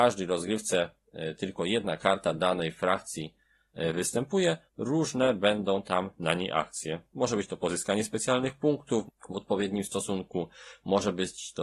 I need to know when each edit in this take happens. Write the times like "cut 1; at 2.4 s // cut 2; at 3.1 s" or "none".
cut 1; at 4.7 s // cut 2; at 9.1 s